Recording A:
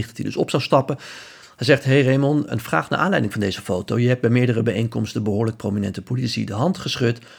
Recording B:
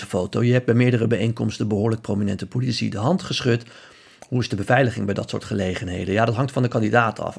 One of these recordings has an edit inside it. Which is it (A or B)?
A